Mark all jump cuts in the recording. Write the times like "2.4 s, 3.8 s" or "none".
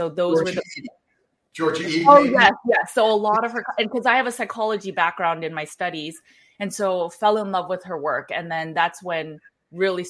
none

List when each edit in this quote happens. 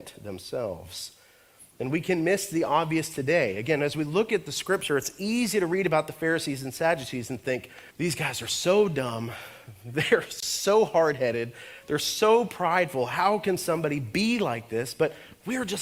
7.9 s

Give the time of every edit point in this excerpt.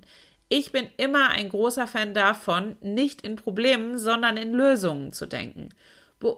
none

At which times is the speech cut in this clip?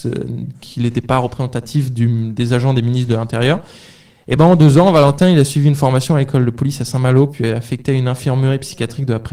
none

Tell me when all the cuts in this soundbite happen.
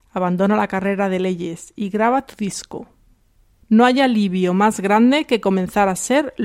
3.6 s

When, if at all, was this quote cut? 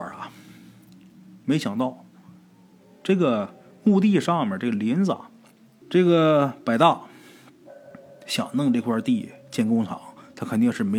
5.8 s

